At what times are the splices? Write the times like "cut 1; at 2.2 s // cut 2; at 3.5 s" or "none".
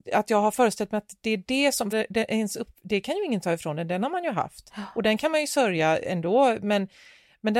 cut 1; at 1.9 s